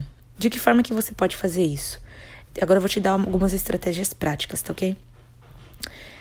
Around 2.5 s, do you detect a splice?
yes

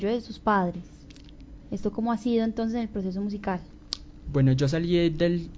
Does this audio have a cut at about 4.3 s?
yes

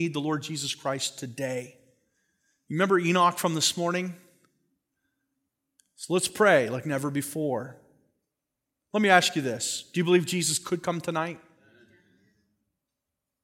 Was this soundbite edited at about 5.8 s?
yes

